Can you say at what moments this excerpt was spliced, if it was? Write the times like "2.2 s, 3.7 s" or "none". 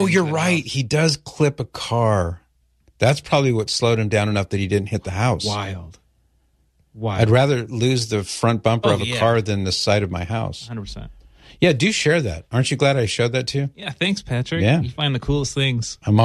none